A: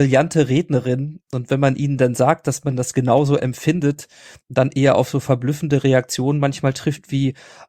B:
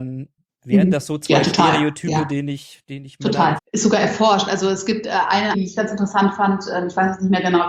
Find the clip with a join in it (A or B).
B